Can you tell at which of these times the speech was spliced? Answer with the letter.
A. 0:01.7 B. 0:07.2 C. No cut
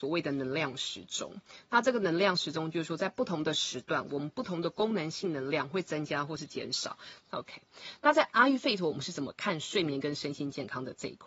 B